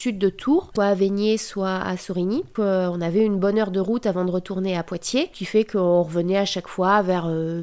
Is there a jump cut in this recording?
no; 0 cuts

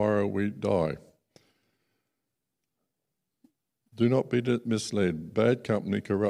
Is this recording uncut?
yes; 0 cuts

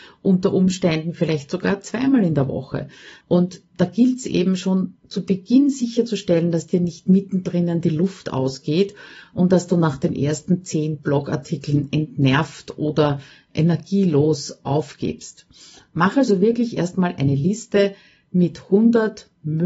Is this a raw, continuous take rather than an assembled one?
no; 1 cut; at 3.2 s

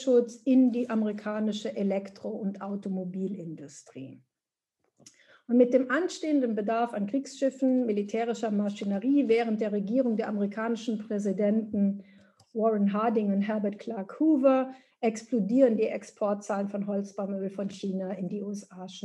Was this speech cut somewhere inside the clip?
no; 0 cuts

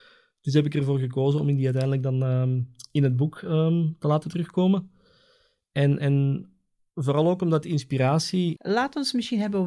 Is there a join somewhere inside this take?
yes; 1 cut; at 8.6 s

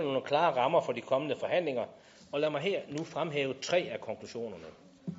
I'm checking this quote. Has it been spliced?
no; 0 cuts

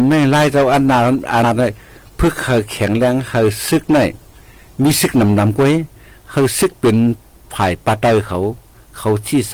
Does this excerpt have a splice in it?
yes; 1 cut; at 1.4 s

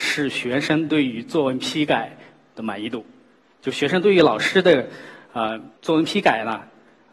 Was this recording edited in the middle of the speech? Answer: yes; 1 cut; at 5.8 s

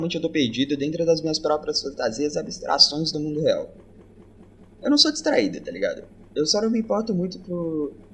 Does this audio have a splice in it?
no; 0 cuts

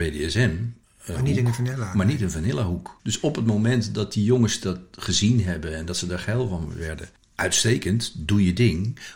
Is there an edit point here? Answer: yes; 1 cut; at 7.2 s

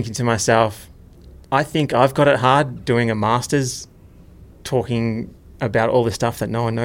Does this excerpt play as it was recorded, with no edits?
no; 1 cut; at 1.4 s

